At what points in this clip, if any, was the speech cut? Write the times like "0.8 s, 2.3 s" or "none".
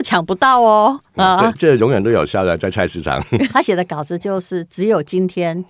1.5 s, 3.5 s